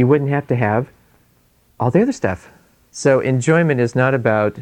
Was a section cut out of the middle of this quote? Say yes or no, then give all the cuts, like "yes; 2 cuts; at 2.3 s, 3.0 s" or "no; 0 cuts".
yes; 1 cut; at 2.9 s